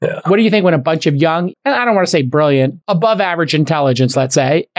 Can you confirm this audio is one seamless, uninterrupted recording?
no; 2 cuts; at 1.5 s, 2.8 s

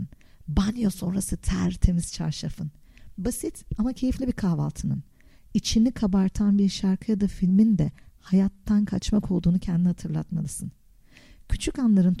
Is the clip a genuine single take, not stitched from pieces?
yes; 0 cuts

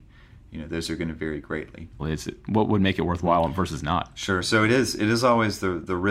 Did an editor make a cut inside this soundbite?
yes; 1 cut; at 2.0 s

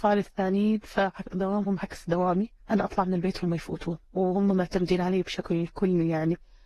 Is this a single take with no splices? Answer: no; 2 cuts; at 2.6 s, 4.0 s

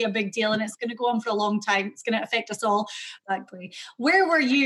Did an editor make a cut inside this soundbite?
yes; 1 cut; at 3.2 s

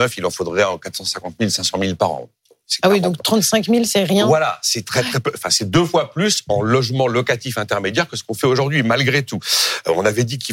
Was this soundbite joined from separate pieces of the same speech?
no; 0 cuts

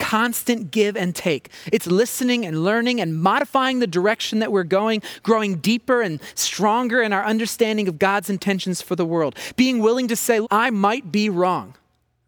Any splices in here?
yes; 1 cut; at 10.4 s

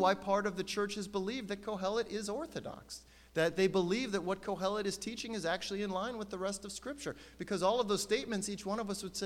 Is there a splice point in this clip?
no; 0 cuts

